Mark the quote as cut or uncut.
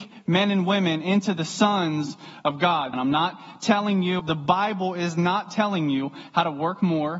cut